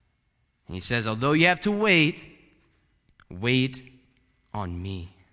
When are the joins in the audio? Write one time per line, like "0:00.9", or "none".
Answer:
none